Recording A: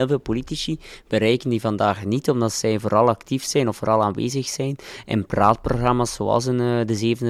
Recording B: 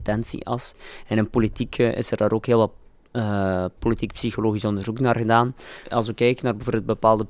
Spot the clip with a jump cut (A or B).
B